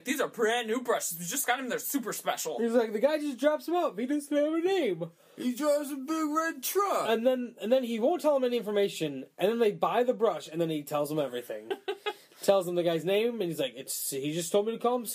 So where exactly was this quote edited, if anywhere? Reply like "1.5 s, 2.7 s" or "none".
none